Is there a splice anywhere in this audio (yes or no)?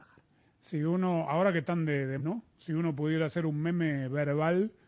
yes